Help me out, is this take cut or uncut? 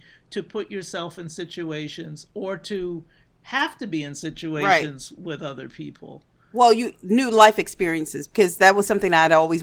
uncut